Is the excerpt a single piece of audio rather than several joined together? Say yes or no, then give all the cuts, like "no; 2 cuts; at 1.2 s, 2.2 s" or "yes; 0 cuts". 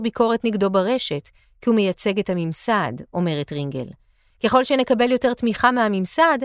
yes; 0 cuts